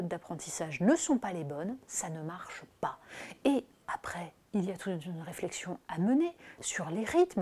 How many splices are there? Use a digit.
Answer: 0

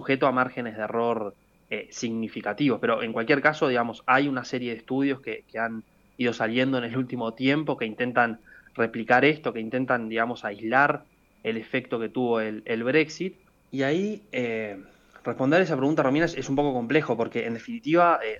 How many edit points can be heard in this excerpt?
1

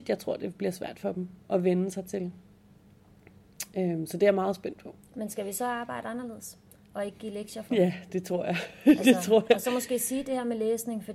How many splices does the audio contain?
0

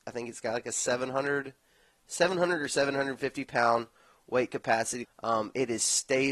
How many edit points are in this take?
1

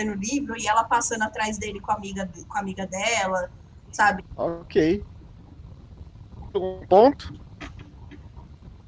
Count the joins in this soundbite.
1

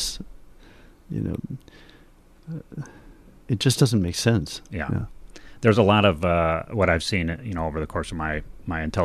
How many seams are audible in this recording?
0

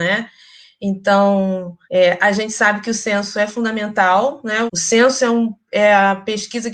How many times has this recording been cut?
2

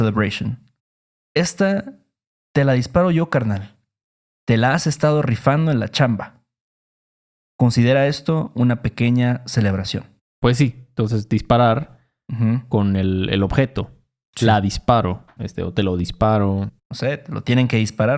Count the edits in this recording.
2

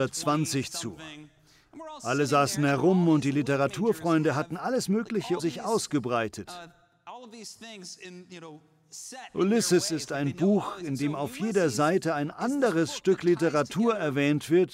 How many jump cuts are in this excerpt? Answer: 1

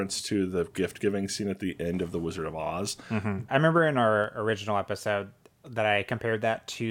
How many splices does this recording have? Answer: 1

